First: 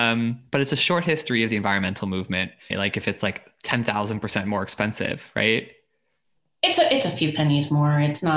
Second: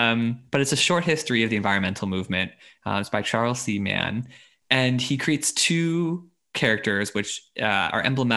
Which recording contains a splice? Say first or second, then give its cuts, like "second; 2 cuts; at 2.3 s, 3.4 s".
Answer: first; 1 cut; at 2.7 s